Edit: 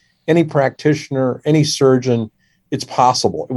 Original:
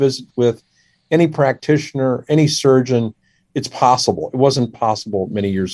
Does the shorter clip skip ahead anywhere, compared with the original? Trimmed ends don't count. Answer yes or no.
no